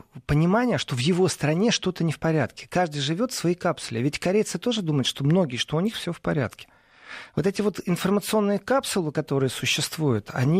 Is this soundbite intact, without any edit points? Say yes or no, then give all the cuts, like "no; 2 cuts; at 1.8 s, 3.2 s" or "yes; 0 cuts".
yes; 0 cuts